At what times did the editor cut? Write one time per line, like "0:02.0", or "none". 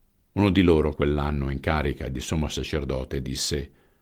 0:00.9